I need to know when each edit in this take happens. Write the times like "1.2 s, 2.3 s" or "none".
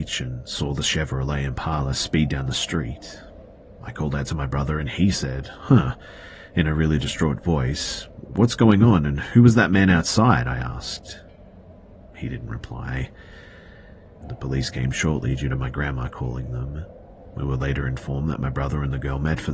14.2 s